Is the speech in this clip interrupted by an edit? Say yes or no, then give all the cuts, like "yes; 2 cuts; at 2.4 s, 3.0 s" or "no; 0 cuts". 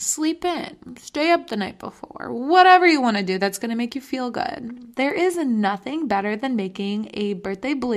yes; 1 cut; at 4.9 s